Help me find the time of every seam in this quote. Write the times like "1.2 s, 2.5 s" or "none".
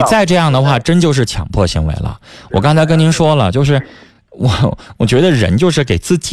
none